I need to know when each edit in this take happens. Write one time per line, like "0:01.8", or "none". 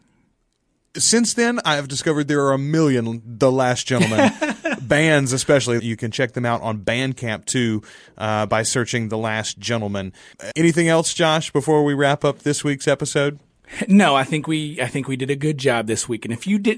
0:05.8
0:10.5

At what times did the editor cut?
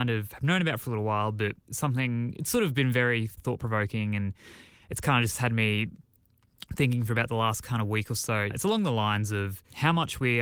0:01.6
0:03.4

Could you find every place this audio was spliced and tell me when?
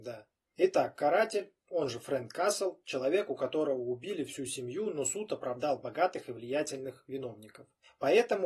none

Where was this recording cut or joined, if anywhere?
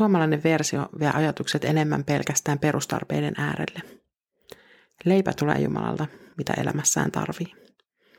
0:06.3

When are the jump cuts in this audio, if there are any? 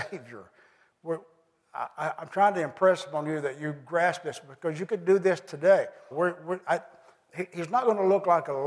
0:06.1

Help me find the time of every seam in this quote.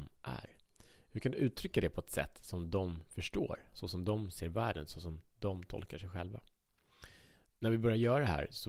none

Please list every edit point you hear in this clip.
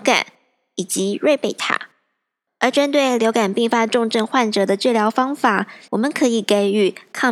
0:02.5
0:05.9

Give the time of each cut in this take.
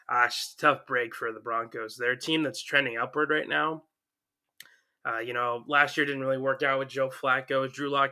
none

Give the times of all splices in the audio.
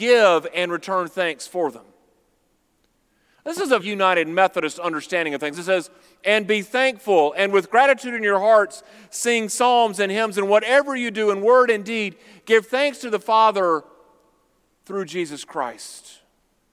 0:03.8
0:05.5

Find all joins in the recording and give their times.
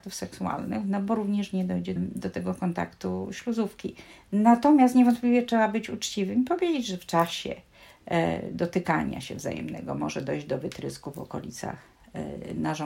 0:02.0

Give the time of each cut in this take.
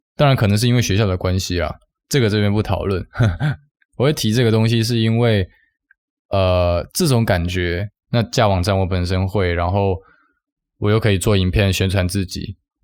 0:08.0

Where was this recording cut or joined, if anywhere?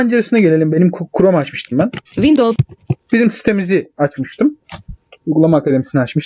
0:02.0

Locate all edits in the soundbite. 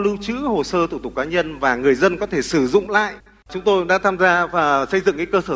0:03.4

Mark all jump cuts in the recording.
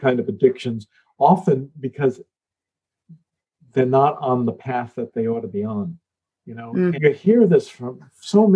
0:06.9

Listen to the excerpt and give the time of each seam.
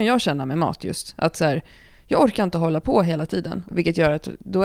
0:03.7

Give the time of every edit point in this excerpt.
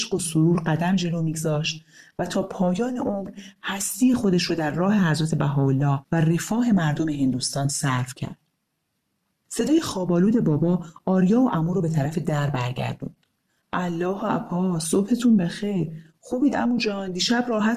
none

